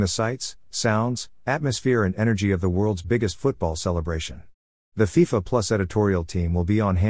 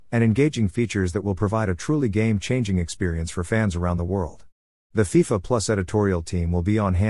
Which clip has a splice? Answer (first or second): second